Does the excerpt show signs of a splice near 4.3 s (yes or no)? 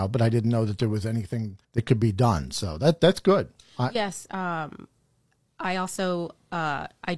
yes